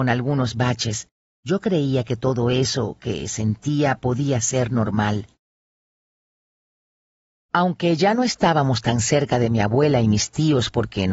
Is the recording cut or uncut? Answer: uncut